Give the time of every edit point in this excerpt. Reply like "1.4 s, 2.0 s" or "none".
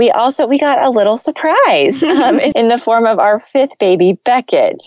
2.5 s